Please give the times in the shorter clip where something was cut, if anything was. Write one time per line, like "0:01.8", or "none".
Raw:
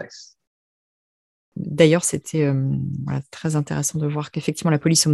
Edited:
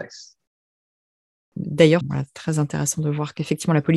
0:02.0